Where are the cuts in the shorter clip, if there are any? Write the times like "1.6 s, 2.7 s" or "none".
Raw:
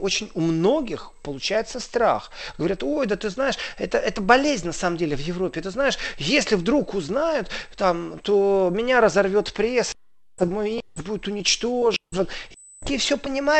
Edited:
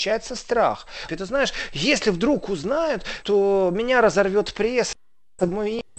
1.1 s, 3.2 s